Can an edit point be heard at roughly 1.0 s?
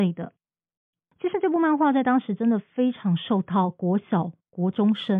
yes; 1 cut; at 1.0 s

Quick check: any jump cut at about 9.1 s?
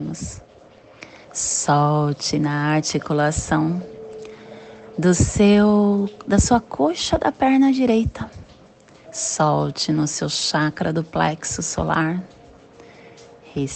yes; 2 cuts; at 1.2 s, 9.1 s

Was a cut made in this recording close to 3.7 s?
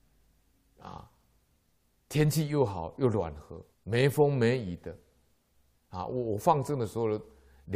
yes; 1 cut; at 3.7 s

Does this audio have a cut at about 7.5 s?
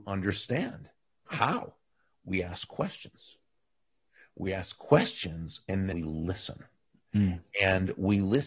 no; 2 cuts; at 1.3 s, 5.9 s

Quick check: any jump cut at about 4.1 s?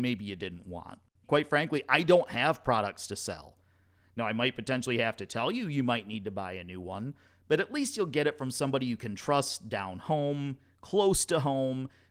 no; 1 cut; at 1.2 s

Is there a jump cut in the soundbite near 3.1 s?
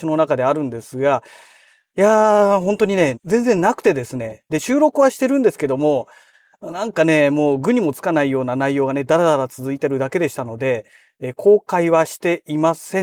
yes; 1 cut; at 3.1 s

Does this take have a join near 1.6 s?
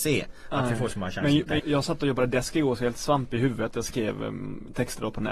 yes; 1 cut; at 1.6 s

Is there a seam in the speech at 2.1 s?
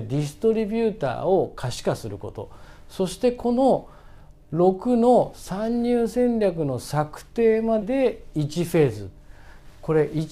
no; 1 cut; at 7.8 s

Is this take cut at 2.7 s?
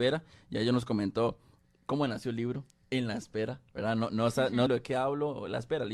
no; 1 cut; at 4.7 s

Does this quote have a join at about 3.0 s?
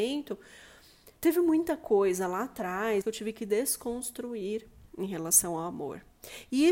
yes; 2 cuts; at 1.2 s, 3.0 s

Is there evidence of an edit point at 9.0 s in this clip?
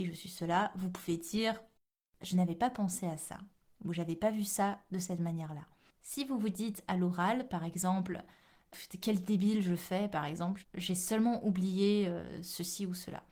yes; 2 cuts; at 9.0 s, 10.6 s

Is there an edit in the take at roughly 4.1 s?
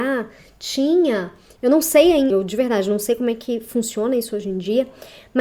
no; 1 cut; at 2.3 s

